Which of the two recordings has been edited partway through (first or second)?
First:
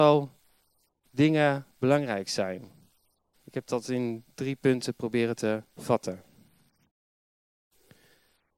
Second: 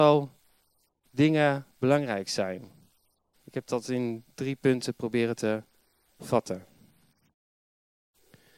first